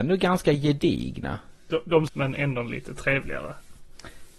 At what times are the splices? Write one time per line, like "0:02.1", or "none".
0:02.1